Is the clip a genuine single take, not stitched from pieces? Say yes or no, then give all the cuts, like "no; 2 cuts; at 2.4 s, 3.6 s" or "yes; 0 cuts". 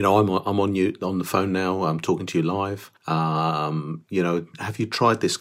no; 1 cut; at 3.0 s